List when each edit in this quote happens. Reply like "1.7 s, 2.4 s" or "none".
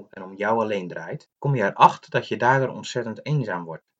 1.4 s

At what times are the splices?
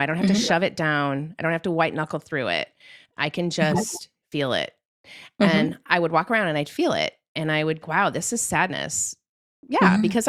7.8 s

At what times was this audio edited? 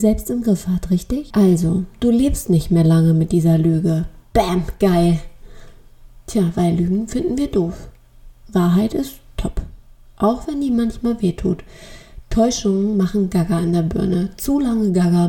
1.3 s

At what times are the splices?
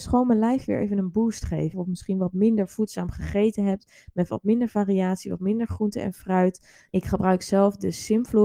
1.7 s, 6.9 s

